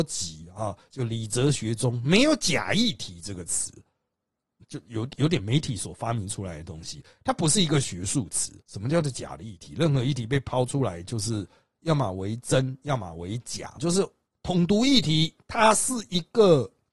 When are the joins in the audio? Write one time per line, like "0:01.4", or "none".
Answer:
0:04.6
0:08.6
0:13.8